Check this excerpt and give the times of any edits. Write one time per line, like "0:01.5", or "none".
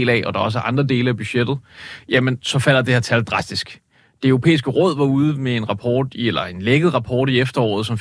none